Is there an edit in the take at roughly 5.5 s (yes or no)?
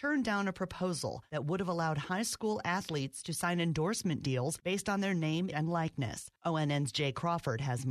yes